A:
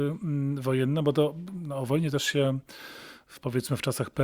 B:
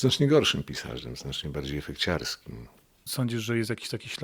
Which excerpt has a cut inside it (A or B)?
B